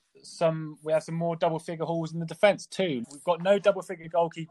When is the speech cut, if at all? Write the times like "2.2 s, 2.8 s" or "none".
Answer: 3.0 s

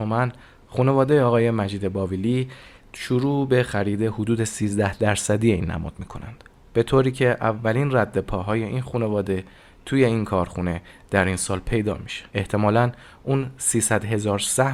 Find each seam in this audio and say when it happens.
12.3 s

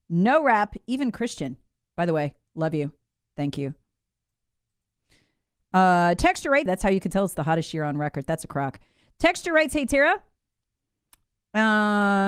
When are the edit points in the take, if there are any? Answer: 6.7 s

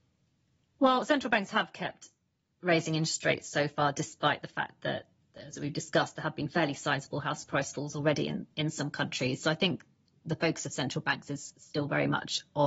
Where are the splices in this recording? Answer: none

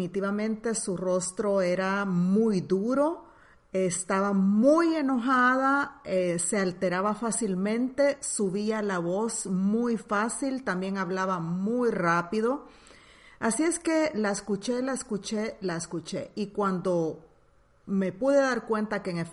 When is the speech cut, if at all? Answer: none

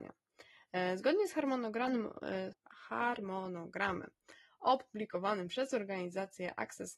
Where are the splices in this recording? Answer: 2.5 s

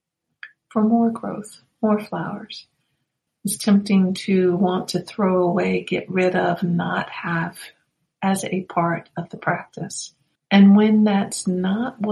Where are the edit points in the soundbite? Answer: 3.3 s, 10.4 s

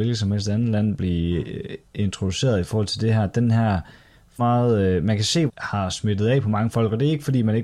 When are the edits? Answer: 4.4 s, 5.5 s

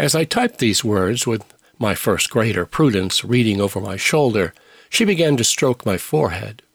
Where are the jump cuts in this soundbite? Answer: none

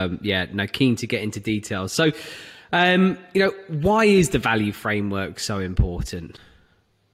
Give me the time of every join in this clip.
none

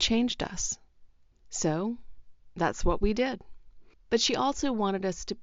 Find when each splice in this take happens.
1.3 s, 3.9 s

